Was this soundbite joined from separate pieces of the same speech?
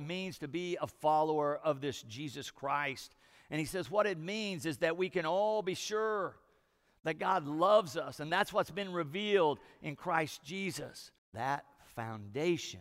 yes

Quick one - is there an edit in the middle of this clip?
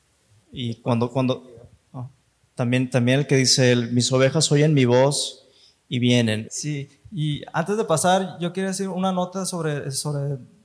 yes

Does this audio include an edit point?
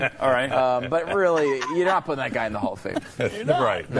no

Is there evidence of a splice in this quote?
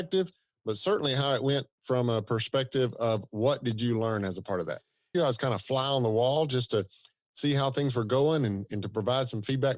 yes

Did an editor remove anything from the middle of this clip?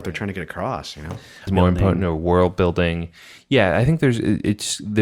yes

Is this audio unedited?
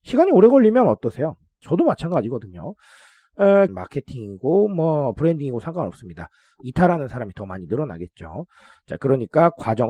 no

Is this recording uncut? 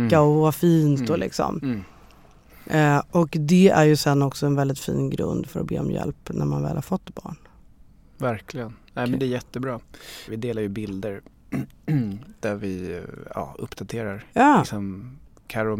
no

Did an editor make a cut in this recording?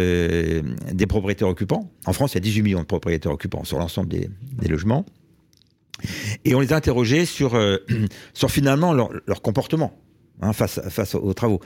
no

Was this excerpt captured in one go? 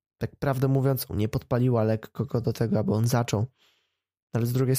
no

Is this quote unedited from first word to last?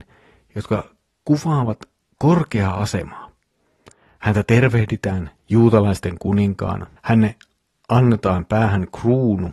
no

